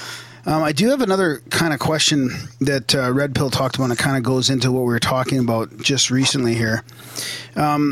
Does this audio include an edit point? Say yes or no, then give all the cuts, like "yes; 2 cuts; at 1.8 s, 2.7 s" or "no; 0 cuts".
no; 0 cuts